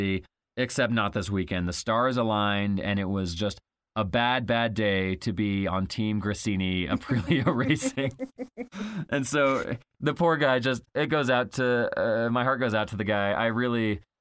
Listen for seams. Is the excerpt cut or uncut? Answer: cut